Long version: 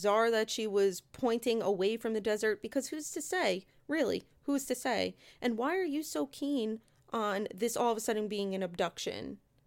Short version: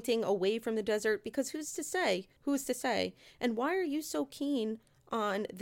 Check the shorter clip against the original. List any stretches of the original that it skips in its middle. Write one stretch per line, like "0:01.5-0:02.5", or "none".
0:03.7-0:04.4